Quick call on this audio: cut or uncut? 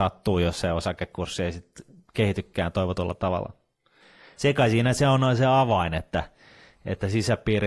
uncut